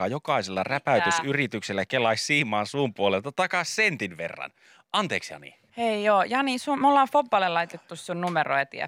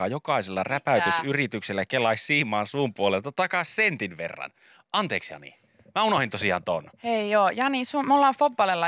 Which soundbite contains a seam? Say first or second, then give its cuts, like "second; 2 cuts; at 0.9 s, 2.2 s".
first; 1 cut; at 5.7 s